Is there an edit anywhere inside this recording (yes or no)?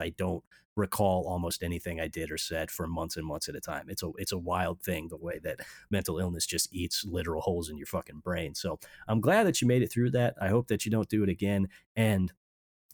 no